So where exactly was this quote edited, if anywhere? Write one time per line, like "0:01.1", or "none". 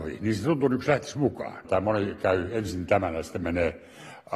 0:01.6